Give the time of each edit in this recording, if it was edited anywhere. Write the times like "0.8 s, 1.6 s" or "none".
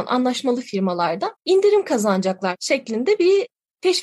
1.4 s